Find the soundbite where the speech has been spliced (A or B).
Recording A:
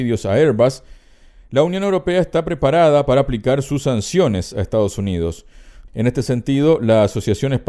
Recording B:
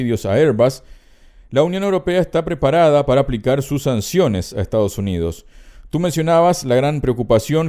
A